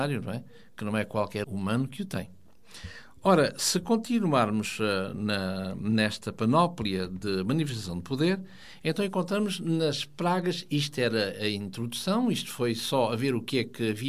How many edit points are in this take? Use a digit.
1